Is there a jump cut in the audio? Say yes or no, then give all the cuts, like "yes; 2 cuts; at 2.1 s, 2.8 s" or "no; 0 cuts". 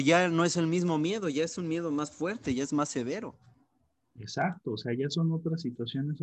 no; 0 cuts